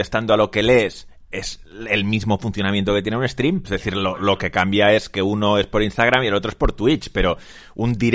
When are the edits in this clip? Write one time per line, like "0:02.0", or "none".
0:03.6

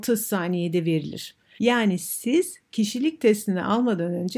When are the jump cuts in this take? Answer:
0:01.6

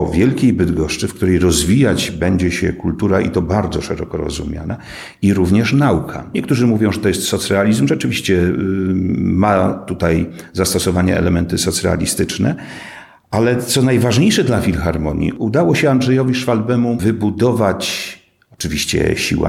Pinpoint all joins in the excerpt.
0:06.3

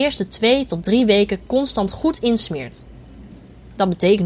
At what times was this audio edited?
none

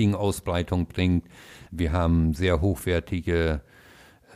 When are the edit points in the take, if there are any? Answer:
0:01.7

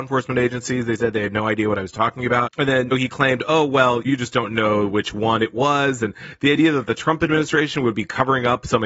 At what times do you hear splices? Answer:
none

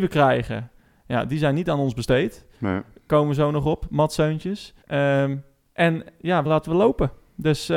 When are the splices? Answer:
0:04.8
0:06.4

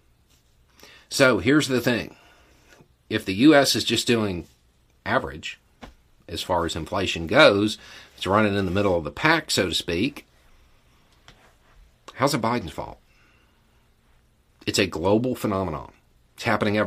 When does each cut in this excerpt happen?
none

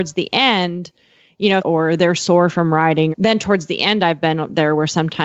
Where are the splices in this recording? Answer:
0:01.6
0:03.1

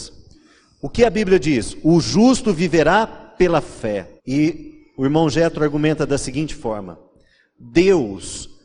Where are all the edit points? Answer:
0:04.2

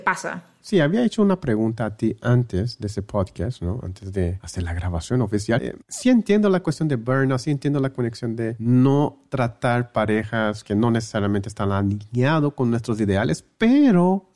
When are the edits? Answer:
0:05.6

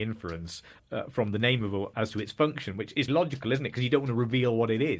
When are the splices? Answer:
0:01.9
0:03.1

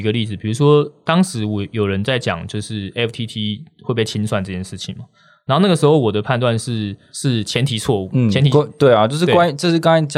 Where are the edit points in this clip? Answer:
0:07.1

